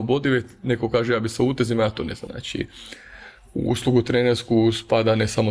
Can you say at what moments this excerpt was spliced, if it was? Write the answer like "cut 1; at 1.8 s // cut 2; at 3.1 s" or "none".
cut 1; at 2.3 s